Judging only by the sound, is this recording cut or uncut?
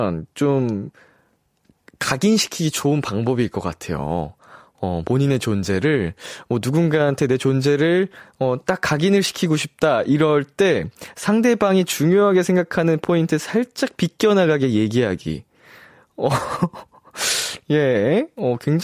uncut